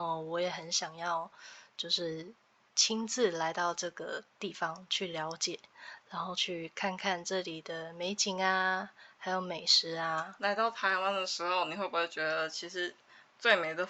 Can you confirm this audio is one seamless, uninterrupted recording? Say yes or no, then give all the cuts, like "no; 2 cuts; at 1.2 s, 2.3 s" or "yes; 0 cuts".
yes; 0 cuts